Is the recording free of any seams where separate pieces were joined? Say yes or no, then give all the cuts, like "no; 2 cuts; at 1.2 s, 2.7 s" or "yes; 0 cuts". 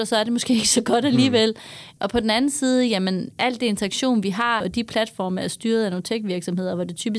no; 2 cuts; at 2.0 s, 4.6 s